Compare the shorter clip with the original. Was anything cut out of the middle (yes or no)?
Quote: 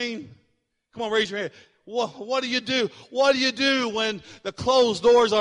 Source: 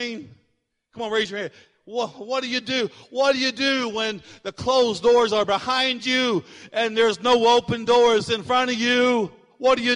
no